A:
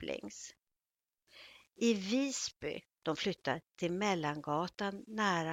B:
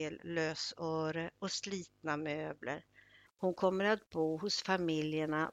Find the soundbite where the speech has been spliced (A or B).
B